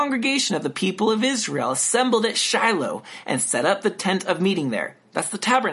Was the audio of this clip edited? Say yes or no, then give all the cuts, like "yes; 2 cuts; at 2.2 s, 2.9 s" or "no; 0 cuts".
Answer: no; 0 cuts